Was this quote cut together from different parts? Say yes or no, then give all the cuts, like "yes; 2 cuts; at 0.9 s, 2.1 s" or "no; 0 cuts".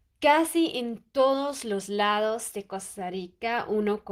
no; 0 cuts